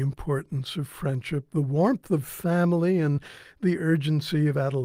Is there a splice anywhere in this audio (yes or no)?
no